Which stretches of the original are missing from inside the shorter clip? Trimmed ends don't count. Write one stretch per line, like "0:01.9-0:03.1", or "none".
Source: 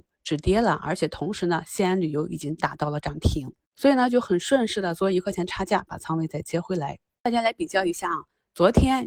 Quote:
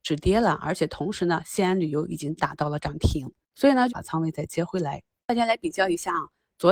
0:04.1-0:05.9